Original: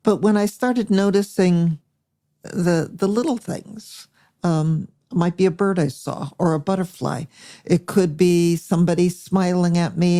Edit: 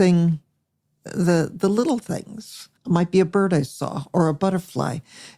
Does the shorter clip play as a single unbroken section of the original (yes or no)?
no